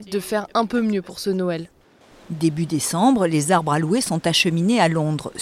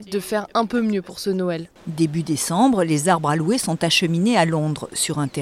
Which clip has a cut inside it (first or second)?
second